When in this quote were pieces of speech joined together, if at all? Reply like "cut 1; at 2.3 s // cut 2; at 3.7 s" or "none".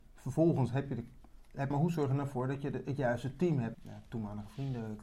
cut 1; at 1.7 s // cut 2; at 3.7 s